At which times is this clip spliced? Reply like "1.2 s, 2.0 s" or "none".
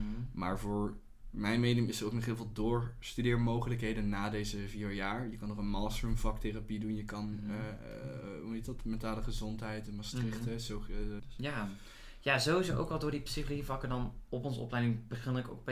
11.2 s

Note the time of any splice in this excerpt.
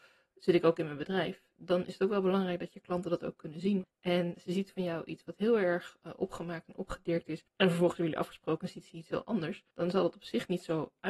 3.8 s, 7.5 s, 9.7 s

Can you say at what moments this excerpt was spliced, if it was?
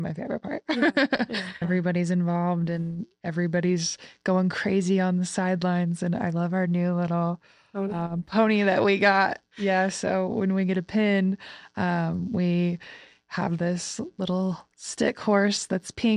1.6 s

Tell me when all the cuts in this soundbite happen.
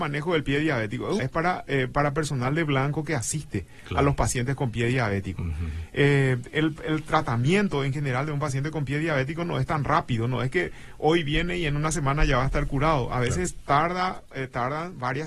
1.2 s

